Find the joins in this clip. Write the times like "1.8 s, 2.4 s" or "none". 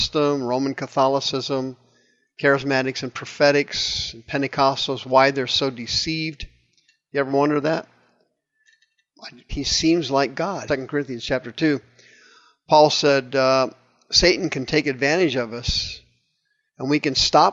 9.5 s, 10.7 s